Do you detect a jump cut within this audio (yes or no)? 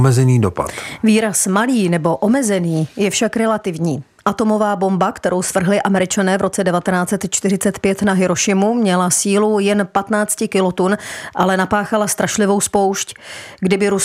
no